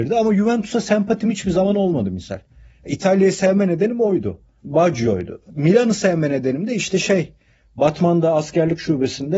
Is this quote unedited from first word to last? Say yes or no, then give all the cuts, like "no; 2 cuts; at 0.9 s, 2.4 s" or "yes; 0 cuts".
yes; 0 cuts